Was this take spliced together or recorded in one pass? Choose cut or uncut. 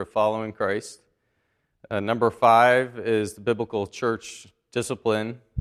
uncut